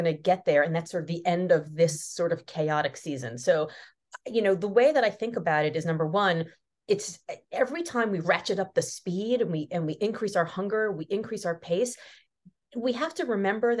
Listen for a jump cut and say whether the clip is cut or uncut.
uncut